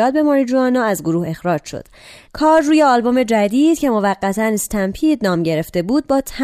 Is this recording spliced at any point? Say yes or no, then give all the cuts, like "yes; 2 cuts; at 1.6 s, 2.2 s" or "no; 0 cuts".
no; 0 cuts